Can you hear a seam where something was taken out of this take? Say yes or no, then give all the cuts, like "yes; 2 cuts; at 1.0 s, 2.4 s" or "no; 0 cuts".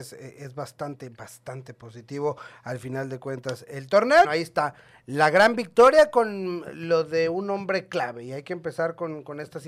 yes; 1 cut; at 4.2 s